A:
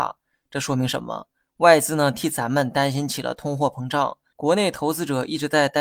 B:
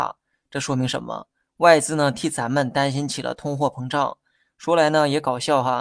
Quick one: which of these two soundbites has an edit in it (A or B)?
A